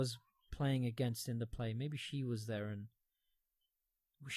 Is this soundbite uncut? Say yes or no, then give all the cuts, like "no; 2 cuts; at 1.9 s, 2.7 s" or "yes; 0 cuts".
yes; 0 cuts